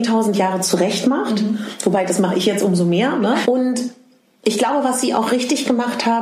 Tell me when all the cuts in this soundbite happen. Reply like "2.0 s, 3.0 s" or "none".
3.4 s